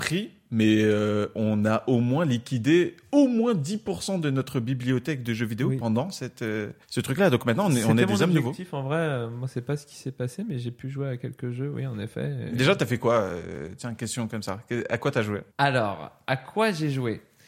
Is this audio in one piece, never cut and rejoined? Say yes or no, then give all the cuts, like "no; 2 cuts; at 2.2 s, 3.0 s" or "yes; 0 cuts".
no; 2 cuts; at 6.8 s, 15.5 s